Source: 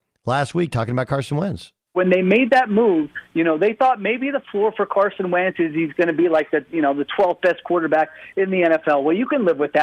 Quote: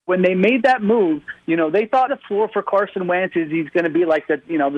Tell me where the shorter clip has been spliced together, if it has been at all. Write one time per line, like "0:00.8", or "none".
0:02.1